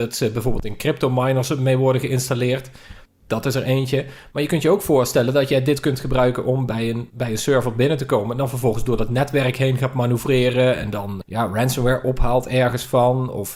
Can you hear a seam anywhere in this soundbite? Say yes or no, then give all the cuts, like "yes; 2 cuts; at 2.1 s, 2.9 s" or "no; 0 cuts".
yes; 1 cut; at 11.2 s